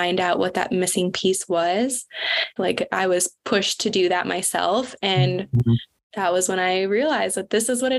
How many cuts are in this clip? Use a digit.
1